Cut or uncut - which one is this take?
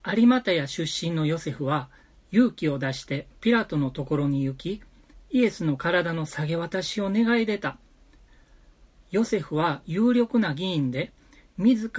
uncut